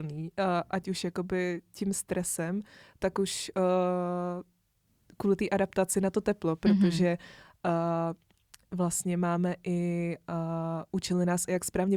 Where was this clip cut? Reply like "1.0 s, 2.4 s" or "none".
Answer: none